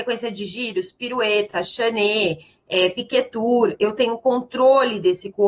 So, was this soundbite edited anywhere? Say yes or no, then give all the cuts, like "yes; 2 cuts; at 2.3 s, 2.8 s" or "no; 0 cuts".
no; 0 cuts